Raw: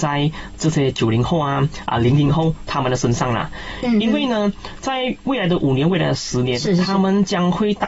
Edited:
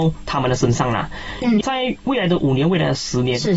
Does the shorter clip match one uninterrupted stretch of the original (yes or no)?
no